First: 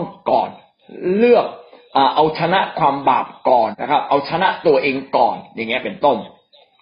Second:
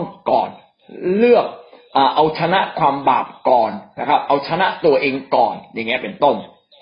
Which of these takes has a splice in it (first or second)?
first